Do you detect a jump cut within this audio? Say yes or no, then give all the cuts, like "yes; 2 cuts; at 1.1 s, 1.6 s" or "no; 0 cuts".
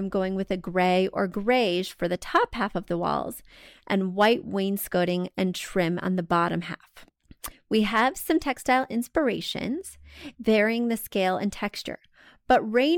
yes; 1 cut; at 10.3 s